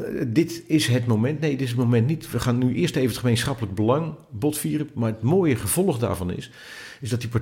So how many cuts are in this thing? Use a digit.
0